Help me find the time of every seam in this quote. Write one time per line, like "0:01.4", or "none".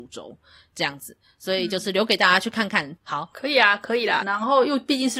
0:03.0
0:04.2